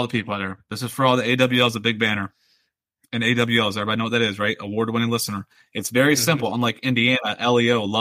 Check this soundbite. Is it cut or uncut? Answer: uncut